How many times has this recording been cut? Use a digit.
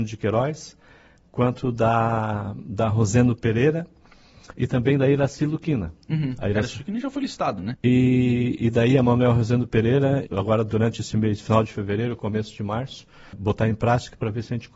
3